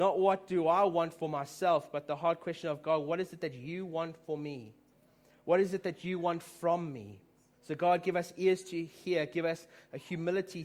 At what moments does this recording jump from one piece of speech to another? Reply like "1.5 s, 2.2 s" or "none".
7.5 s

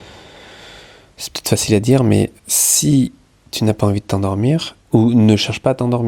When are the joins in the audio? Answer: 2.4 s, 4.8 s

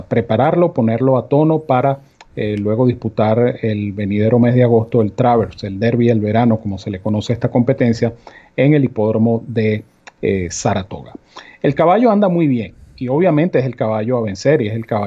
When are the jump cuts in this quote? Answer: none

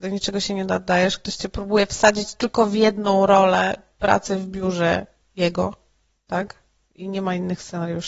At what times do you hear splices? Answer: none

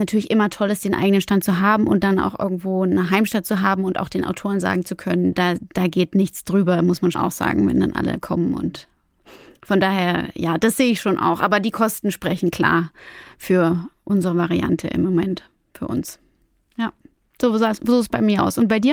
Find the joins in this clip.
5.3 s, 7.1 s

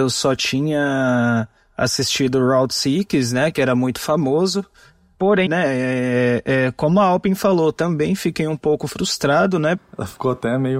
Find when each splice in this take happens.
5.5 s, 9.8 s

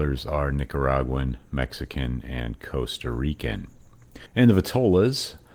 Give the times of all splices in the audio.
4.3 s

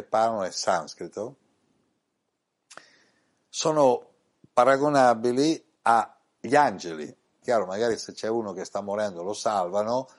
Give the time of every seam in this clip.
5.8 s, 7.4 s

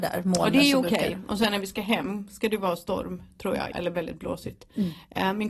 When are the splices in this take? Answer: 3.7 s

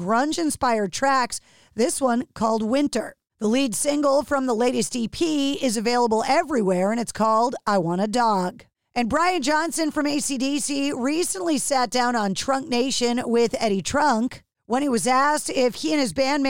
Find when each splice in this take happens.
none

